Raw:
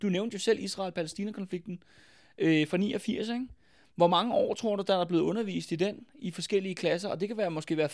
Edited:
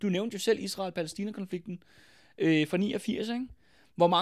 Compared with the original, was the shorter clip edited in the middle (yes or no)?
no